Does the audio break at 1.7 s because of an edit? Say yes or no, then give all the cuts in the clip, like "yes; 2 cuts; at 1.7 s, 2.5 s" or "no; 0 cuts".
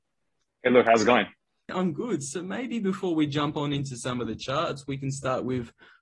yes; 1 cut; at 1.7 s